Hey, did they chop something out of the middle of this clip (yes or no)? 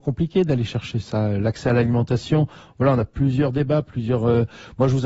no